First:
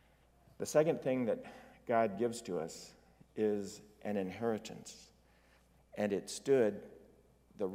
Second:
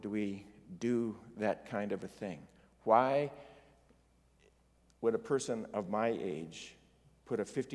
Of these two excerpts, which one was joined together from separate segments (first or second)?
first